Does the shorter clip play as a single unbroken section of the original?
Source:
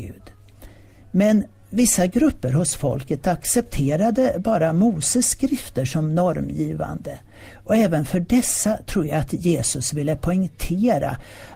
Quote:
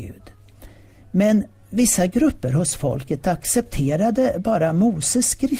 yes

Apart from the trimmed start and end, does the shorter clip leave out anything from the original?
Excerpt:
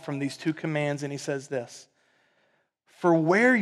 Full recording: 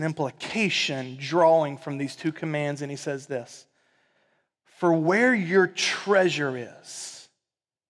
no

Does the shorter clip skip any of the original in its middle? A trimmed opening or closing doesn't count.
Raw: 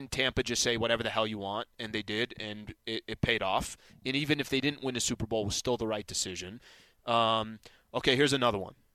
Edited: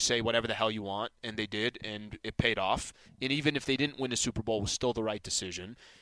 yes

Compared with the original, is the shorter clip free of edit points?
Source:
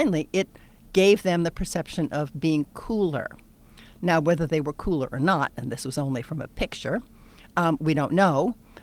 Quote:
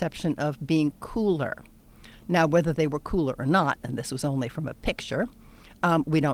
yes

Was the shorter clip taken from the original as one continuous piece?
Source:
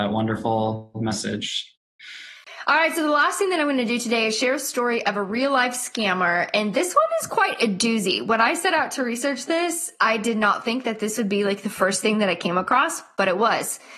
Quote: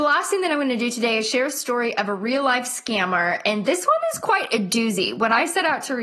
yes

